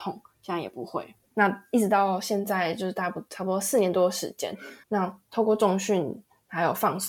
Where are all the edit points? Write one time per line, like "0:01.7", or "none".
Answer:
0:01.3
0:04.8